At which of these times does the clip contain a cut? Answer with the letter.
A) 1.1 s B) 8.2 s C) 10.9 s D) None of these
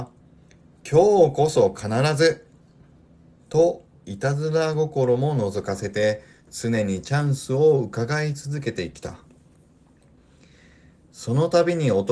C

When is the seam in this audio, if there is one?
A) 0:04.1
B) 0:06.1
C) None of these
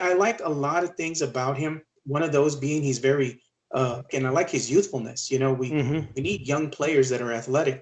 A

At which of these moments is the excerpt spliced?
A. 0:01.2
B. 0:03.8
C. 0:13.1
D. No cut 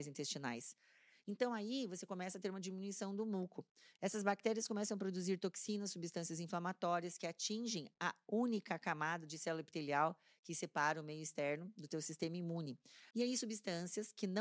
C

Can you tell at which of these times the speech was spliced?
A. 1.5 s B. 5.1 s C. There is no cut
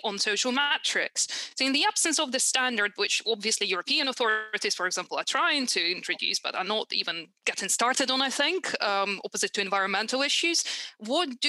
C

